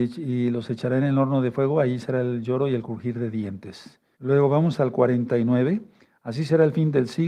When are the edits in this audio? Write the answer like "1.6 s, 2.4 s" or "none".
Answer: 4.2 s